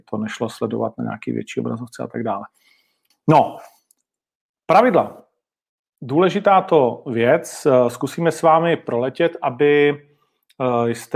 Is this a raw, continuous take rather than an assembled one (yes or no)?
no